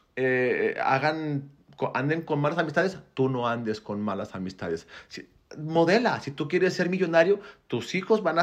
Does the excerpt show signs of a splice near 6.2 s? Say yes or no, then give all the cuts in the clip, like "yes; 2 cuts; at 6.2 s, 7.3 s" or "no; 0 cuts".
no; 0 cuts